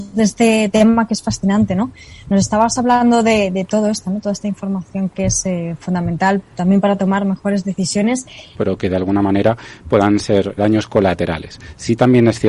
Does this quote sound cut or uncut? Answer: cut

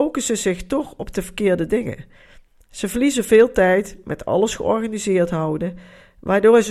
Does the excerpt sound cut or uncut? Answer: uncut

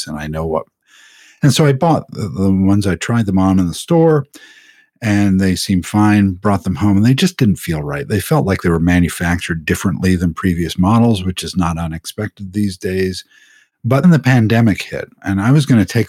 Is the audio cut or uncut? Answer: cut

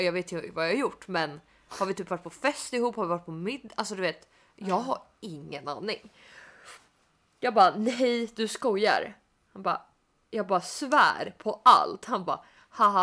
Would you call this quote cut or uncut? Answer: uncut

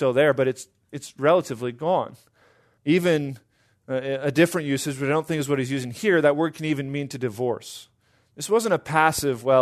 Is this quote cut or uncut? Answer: cut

